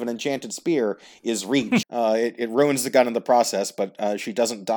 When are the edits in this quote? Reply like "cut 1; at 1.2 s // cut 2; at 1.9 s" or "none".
cut 1; at 1.8 s